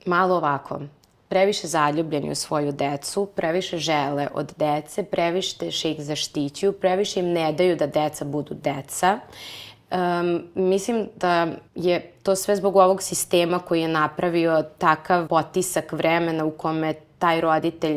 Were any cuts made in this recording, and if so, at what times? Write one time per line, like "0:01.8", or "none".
0:11.7
0:15.3